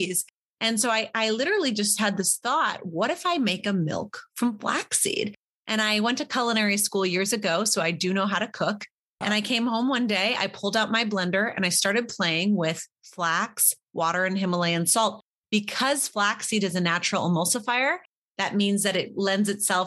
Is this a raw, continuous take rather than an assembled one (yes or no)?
yes